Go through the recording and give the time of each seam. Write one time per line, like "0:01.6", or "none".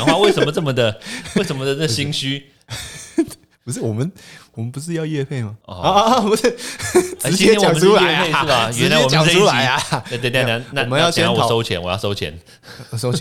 none